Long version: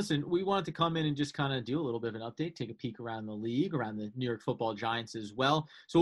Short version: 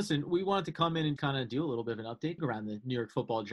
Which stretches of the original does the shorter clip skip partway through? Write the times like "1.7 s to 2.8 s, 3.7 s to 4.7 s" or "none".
1.2 s to 1.3 s, 2.5 s to 3.7 s